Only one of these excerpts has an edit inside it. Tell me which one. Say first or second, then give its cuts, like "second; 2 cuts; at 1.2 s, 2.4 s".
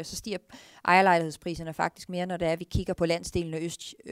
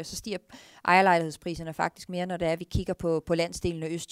first; 1 cut; at 2.9 s